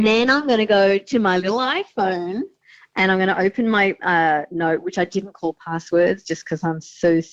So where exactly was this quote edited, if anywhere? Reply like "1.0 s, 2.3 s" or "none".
none